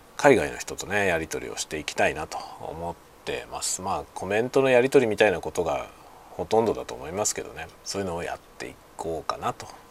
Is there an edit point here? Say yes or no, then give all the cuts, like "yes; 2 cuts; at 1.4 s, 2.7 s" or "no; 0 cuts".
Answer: yes; 1 cut; at 7.7 s